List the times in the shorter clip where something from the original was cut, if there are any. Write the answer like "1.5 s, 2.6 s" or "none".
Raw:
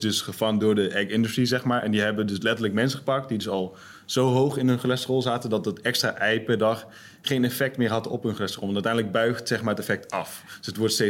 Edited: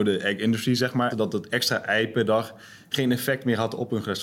1.1 s